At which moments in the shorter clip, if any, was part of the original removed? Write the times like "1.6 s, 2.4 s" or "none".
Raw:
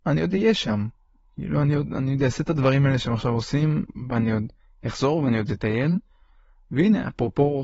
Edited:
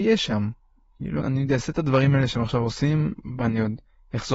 1.2 s